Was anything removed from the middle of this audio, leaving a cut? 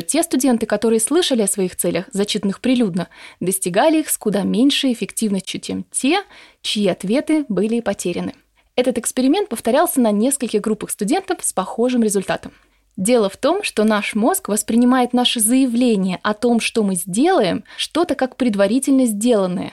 no; 0 cuts

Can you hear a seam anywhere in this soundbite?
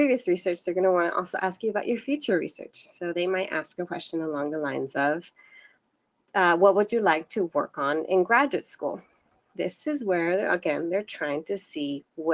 no; 0 cuts

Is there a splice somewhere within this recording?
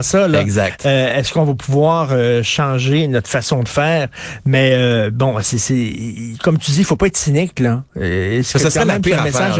no; 0 cuts

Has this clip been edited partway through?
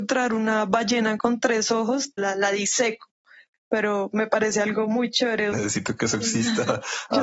yes; 2 cuts; at 2.2 s, 5.5 s

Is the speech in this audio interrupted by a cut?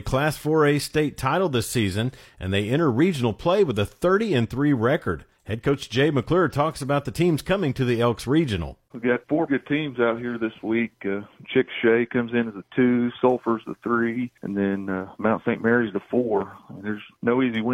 yes; 1 cut; at 9.5 s

